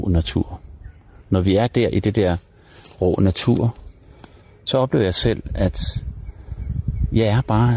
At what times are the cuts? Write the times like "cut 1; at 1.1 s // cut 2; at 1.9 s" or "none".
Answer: none